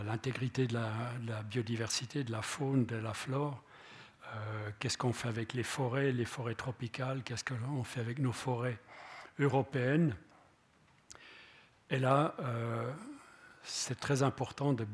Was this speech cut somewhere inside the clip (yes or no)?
no